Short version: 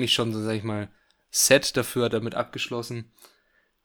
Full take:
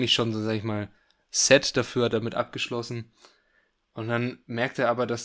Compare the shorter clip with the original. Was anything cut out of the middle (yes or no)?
no